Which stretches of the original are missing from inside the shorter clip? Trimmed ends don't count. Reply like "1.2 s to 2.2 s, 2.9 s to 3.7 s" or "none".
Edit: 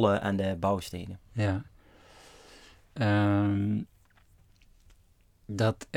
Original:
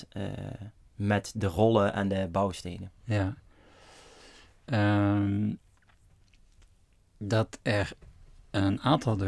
none